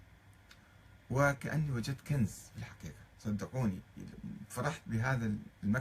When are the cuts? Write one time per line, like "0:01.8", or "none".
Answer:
none